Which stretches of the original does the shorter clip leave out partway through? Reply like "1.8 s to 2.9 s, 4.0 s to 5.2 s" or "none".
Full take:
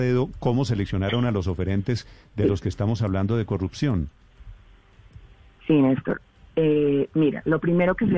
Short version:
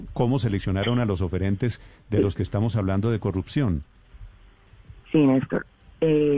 5.3 s to 5.6 s

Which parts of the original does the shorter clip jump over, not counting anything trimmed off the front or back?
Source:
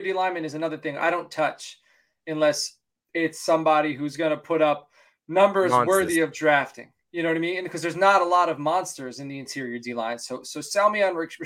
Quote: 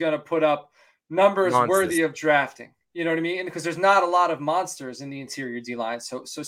none

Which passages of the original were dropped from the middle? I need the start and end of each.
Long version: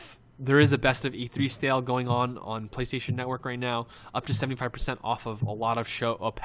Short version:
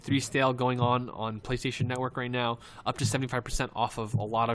none

